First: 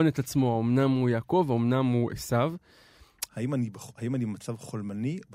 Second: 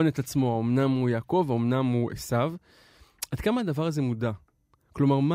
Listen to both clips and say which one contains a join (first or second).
first